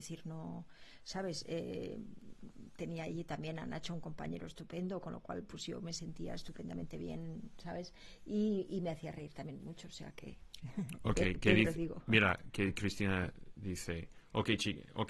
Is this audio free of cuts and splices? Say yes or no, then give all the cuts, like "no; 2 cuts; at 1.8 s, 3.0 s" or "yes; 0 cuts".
yes; 0 cuts